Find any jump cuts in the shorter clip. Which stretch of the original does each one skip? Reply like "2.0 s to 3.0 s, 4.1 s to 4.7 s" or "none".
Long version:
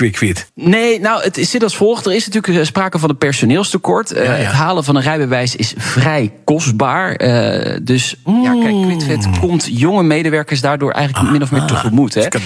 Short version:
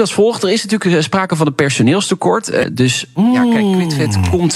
4.3 s to 7.7 s